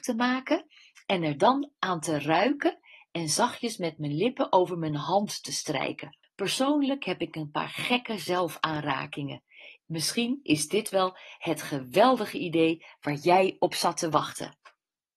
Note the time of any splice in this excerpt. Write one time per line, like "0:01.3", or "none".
0:06.2
0:09.8